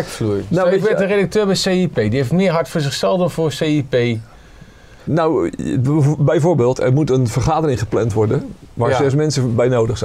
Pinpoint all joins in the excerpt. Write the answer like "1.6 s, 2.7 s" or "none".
5.1 s